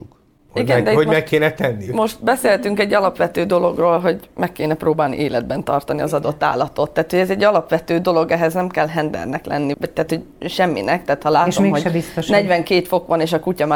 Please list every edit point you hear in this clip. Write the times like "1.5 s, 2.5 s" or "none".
9.7 s